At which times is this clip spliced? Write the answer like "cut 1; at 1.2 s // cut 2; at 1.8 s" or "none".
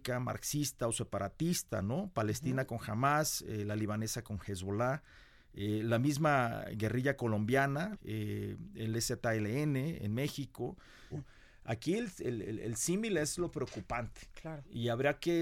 cut 1; at 7.9 s // cut 2; at 11.1 s